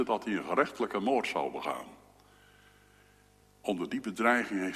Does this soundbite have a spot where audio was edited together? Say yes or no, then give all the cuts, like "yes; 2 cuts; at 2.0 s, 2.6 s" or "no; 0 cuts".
yes; 1 cut; at 3.4 s